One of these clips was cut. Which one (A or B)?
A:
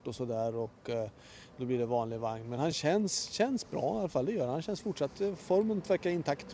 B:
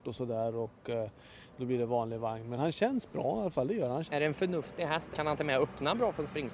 B